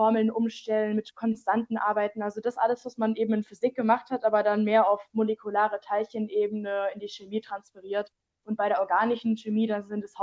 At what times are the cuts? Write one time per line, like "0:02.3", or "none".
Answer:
none